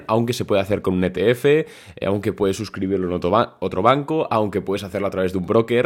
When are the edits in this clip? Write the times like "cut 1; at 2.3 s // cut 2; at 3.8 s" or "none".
none